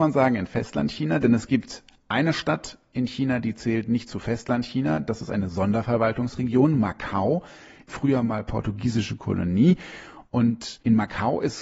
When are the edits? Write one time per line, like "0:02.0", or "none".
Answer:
none